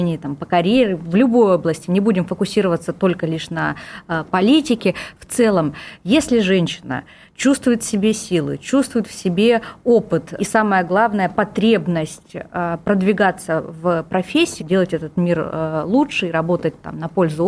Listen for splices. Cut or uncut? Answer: cut